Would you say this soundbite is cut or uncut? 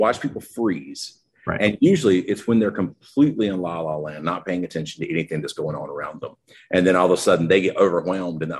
uncut